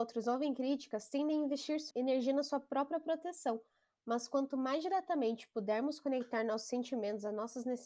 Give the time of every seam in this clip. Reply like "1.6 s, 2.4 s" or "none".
1.9 s